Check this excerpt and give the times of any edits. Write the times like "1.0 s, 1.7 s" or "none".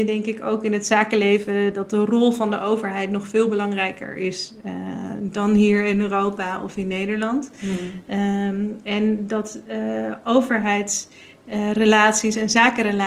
none